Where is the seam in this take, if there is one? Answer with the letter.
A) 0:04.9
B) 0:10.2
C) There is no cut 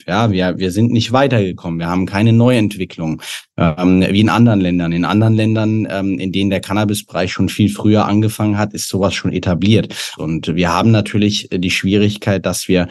B